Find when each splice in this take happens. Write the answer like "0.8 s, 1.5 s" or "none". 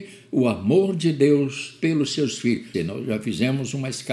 2.7 s